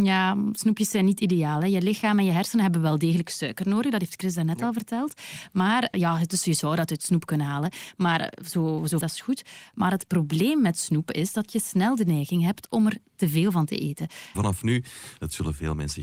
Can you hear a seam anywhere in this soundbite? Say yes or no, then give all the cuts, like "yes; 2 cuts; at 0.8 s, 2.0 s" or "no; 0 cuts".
yes; 3 cuts; at 5.9 s, 9.0 s, 14.3 s